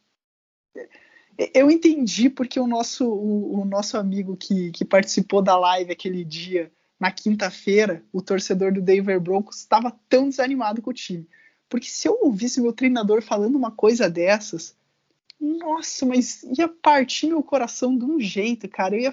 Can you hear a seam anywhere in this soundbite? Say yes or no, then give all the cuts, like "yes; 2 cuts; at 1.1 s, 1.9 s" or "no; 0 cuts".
no; 0 cuts